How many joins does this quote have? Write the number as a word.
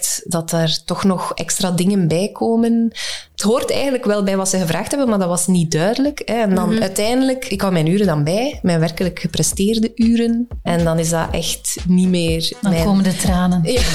one